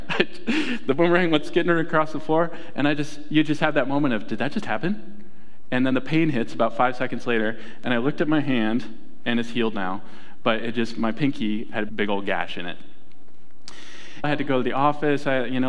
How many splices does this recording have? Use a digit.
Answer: 2